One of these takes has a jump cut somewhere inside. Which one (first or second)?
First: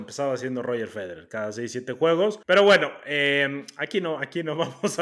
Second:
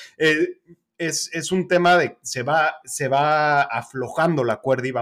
first